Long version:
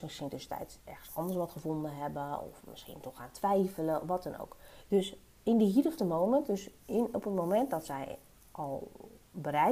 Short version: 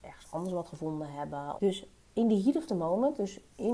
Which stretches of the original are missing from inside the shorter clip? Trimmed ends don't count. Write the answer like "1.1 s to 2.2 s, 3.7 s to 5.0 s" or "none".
2.4 s to 4.9 s